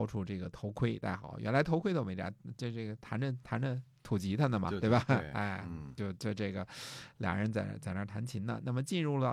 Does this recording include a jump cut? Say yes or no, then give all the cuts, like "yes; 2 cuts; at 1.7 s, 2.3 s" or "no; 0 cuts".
no; 0 cuts